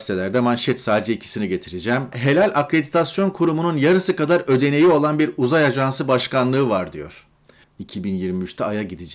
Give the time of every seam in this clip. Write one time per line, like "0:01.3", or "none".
0:02.1
0:07.6